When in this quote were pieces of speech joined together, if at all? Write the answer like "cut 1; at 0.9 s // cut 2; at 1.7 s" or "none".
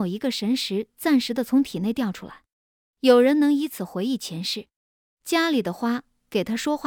none